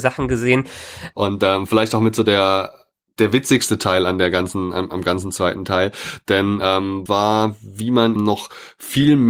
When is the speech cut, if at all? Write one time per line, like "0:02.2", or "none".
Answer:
0:01.1
0:07.1
0:08.2